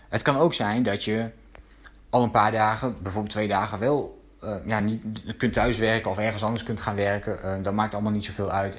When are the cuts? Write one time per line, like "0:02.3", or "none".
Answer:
none